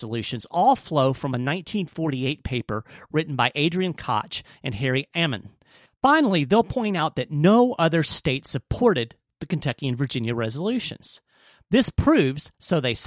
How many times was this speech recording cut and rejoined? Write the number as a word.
one